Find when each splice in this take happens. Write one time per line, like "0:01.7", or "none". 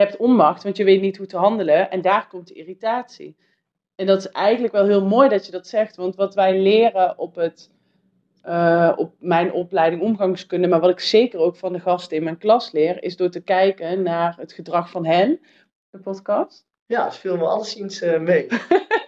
0:15.7
0:16.8